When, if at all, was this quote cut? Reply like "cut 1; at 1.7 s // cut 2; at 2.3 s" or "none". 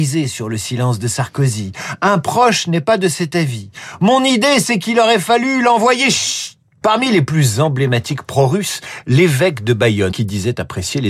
cut 1; at 6.8 s // cut 2; at 10.1 s